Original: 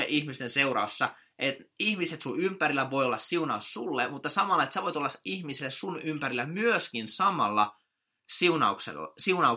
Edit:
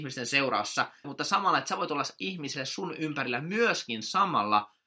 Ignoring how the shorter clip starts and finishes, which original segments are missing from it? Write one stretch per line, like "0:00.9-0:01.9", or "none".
0:01.3-0:04.1